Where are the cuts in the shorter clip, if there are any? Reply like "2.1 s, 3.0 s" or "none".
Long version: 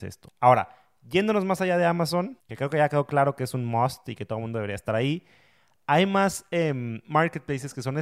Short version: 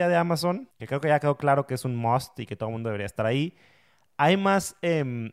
none